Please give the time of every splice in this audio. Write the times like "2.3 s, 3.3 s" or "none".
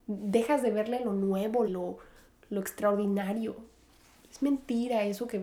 1.7 s